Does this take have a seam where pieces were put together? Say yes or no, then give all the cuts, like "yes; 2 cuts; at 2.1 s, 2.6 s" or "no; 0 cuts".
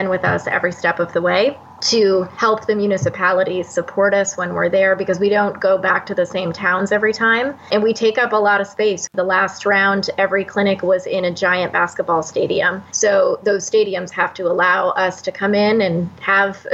no; 0 cuts